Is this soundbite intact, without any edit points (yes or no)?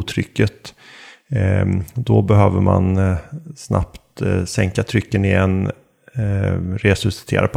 yes